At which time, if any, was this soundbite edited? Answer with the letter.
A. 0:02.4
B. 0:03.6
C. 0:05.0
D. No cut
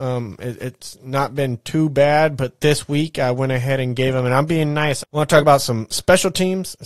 C